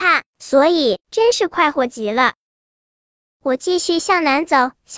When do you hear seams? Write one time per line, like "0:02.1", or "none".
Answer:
0:01.0
0:03.2